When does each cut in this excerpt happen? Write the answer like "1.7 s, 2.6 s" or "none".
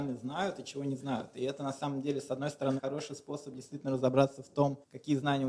2.8 s